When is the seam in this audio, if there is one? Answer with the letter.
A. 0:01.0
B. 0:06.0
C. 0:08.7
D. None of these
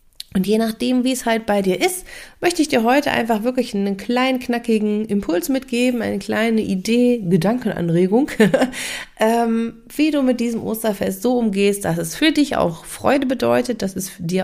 D